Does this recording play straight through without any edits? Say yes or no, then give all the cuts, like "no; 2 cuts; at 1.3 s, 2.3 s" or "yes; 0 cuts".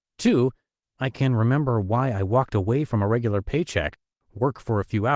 yes; 0 cuts